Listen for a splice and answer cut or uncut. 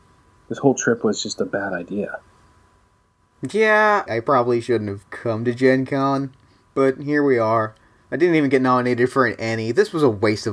cut